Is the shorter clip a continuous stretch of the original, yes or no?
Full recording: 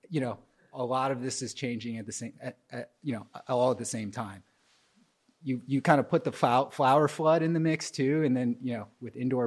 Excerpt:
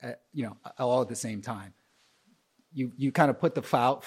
yes